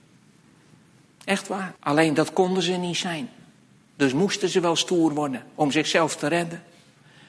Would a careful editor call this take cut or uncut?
cut